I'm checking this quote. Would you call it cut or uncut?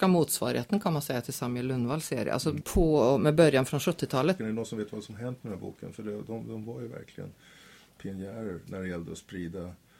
cut